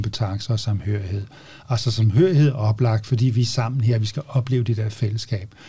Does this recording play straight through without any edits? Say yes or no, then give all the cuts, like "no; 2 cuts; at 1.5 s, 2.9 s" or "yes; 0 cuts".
yes; 0 cuts